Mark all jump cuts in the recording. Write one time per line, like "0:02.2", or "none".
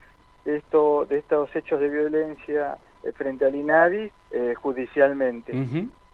0:04.1